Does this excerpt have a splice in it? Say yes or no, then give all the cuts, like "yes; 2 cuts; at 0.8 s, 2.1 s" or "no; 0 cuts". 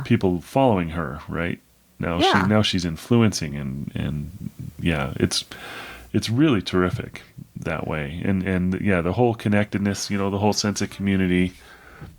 no; 0 cuts